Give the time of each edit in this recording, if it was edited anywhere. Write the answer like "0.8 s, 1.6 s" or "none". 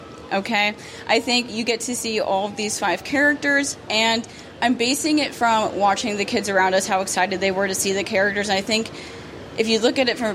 none